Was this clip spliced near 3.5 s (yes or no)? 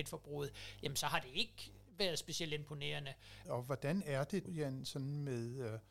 yes